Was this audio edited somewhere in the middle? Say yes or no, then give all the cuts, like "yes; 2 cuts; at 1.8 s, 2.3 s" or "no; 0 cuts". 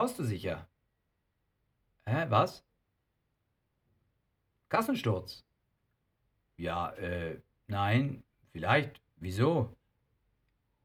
no; 0 cuts